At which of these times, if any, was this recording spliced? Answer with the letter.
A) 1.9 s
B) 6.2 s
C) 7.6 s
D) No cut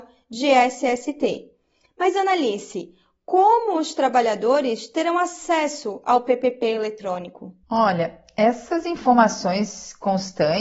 C